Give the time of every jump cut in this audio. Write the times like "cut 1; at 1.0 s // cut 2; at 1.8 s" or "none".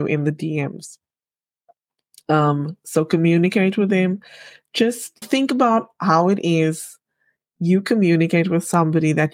cut 1; at 5.2 s